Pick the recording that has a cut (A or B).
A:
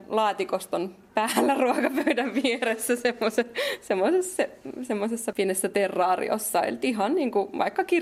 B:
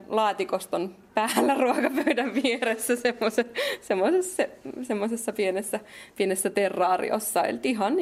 A